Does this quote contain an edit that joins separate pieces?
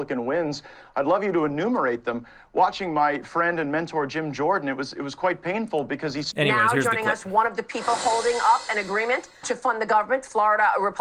yes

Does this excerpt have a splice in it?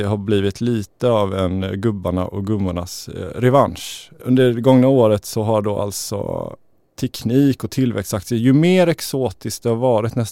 no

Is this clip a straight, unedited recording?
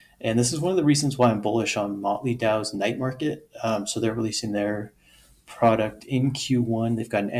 yes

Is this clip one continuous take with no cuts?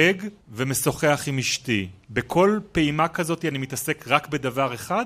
yes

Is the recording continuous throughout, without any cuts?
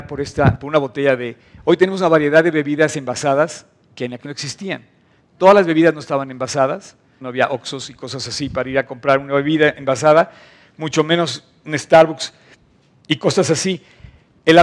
no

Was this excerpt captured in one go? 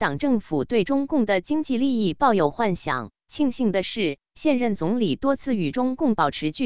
no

